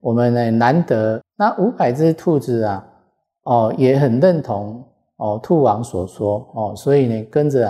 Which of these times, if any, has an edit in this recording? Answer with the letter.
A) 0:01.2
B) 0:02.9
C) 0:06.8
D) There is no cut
A